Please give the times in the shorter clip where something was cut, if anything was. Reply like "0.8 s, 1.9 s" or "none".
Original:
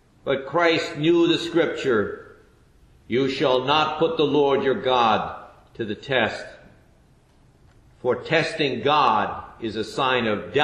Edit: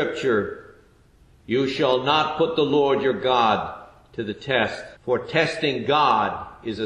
5.0 s